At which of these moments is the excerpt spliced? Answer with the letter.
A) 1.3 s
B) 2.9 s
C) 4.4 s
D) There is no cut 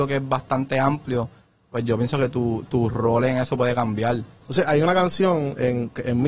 C